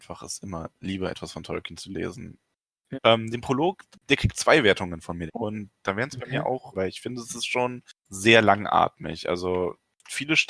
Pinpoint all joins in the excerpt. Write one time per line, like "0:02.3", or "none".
0:02.9
0:05.3
0:06.7

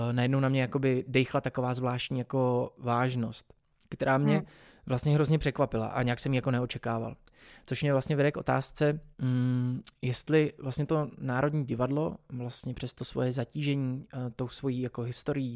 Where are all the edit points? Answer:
0:09.1

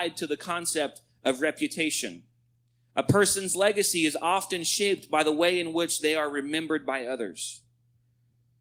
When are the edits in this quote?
none

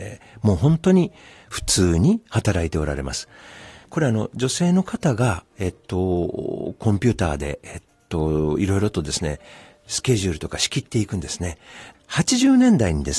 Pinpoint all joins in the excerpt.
0:03.8
0:11.9

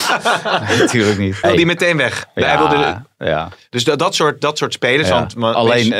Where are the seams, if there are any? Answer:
0:01.4

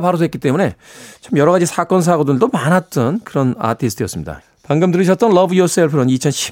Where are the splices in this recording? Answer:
0:04.4

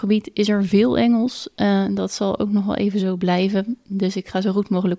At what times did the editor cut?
none

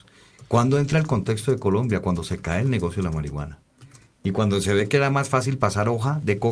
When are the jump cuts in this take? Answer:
none

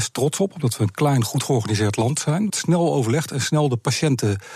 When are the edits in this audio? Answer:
0:02.5

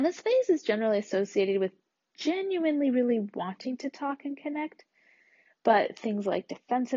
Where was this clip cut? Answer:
none

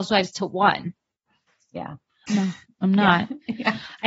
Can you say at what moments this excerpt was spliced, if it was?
0:02.3

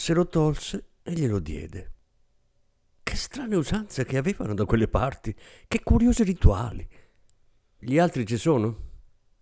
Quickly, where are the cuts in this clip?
0:07.8

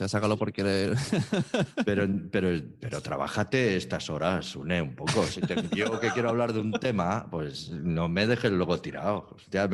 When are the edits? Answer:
none

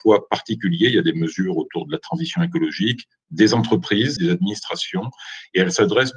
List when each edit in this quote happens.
0:04.2

